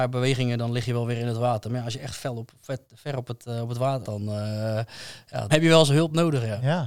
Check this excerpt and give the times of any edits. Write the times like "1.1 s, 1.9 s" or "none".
4.0 s, 5.5 s